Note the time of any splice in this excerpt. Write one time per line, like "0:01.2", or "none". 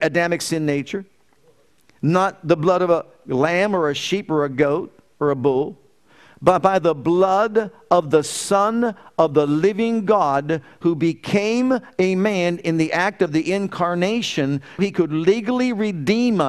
0:14.8